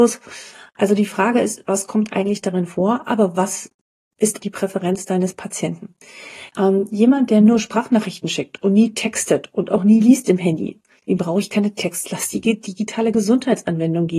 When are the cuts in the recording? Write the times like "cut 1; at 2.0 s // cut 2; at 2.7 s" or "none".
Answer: cut 1; at 4.4 s // cut 2; at 6.5 s

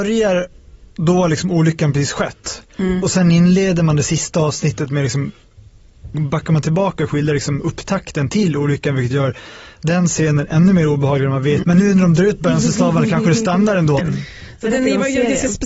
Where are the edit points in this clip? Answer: cut 1; at 6.1 s // cut 2; at 11.6 s // cut 3; at 14.0 s

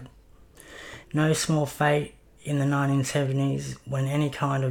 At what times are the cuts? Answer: cut 1; at 1.0 s

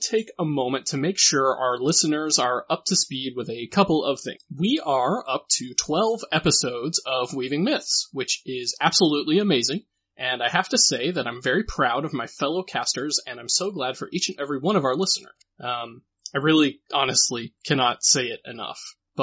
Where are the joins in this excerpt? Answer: none

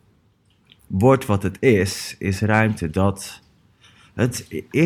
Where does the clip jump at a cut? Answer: none

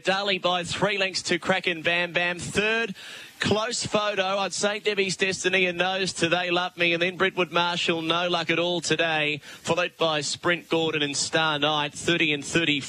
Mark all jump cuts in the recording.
none

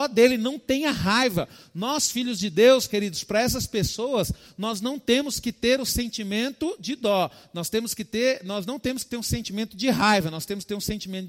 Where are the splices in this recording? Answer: none

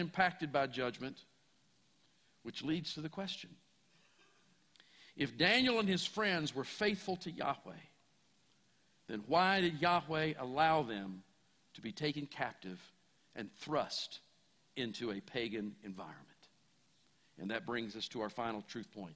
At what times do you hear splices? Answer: none

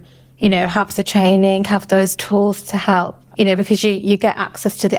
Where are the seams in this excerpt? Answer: cut 1; at 3.3 s

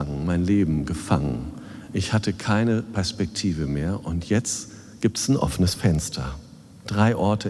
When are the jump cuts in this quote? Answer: none

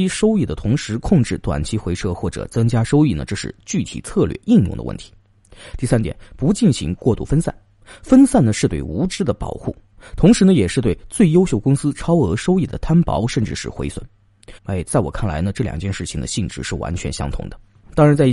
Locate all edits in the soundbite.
cut 1; at 14.6 s

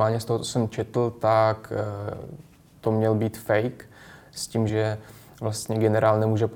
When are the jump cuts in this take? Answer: cut 1; at 4.7 s

